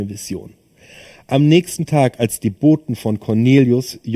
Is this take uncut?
yes; 0 cuts

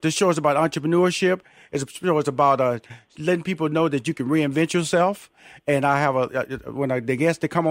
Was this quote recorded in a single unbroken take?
yes; 0 cuts

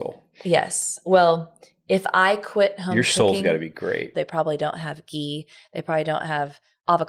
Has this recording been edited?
yes; 1 cut; at 4.1 s

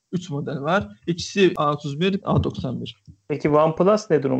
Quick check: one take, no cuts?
no; 1 cut; at 2.2 s

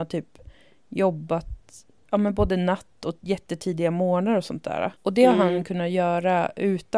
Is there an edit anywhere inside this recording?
yes; 1 cut; at 5.0 s

